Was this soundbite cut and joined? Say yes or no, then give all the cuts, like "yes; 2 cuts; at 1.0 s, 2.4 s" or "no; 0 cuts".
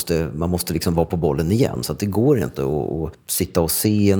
no; 0 cuts